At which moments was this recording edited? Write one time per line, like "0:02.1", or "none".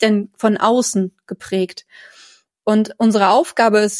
none